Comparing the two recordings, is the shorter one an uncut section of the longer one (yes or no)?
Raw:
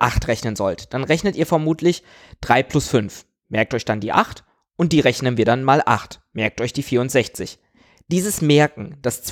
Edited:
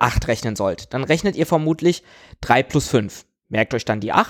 yes